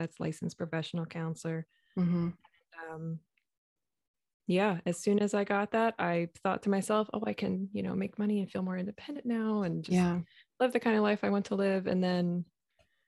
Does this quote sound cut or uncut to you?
uncut